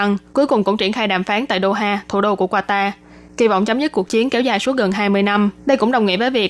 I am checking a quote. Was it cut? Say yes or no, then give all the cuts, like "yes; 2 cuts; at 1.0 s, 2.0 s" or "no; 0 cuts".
yes; 1 cut; at 5.6 s